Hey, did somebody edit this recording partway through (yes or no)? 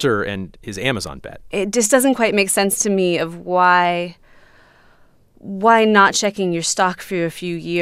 no